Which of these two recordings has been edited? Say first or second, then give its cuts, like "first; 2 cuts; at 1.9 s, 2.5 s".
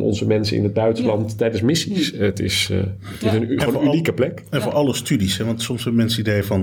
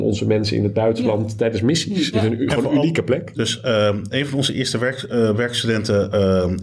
second; 2 cuts; at 2.1 s, 3.3 s